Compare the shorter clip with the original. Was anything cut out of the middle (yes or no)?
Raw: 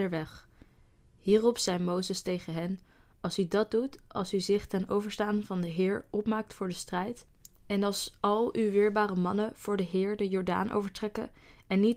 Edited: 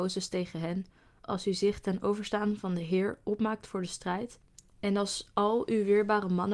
yes